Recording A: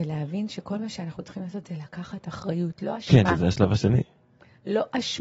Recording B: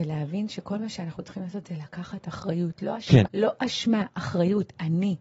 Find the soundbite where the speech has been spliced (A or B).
B